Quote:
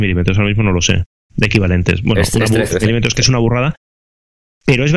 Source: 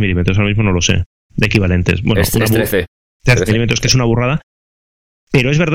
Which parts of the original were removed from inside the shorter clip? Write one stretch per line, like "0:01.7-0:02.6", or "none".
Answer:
0:02.7-0:03.4